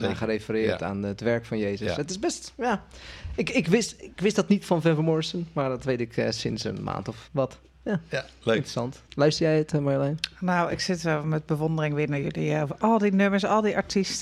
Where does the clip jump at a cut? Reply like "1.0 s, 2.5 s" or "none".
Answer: 7.3 s, 9.1 s